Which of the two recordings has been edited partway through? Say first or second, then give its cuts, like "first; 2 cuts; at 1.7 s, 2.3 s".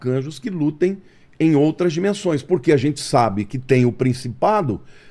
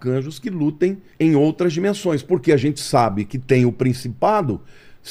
second; 1 cut; at 1.1 s